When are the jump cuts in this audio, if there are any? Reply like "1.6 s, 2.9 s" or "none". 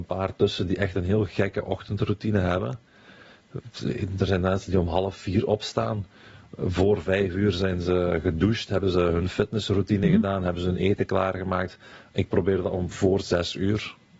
none

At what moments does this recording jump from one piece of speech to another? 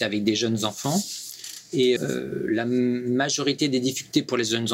2.0 s

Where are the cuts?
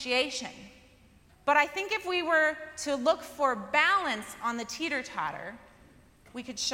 1.3 s

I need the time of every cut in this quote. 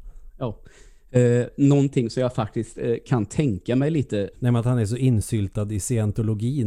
4.3 s

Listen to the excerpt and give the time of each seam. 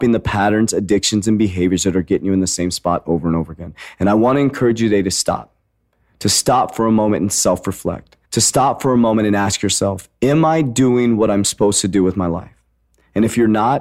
8.2 s

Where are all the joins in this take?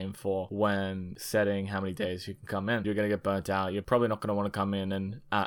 2.8 s

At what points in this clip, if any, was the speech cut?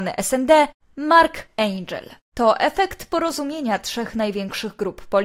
none

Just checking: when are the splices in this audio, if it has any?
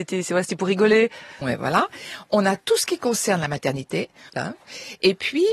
1.4 s, 4.3 s

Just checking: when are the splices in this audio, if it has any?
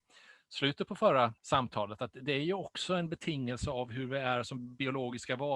1.4 s

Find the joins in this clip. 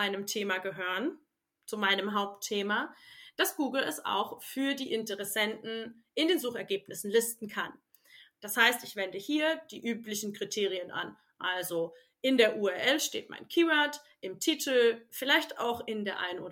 none

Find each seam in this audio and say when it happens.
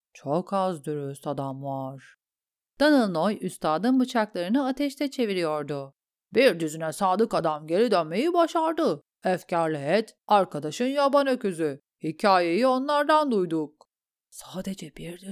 10.2 s

